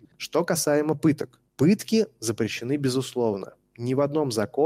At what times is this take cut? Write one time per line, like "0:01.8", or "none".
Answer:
none